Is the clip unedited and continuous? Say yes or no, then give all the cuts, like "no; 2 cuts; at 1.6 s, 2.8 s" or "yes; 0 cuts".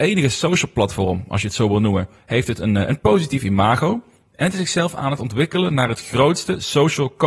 yes; 0 cuts